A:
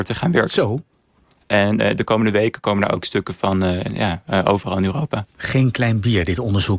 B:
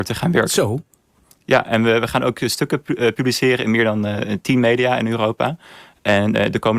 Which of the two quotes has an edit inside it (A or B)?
A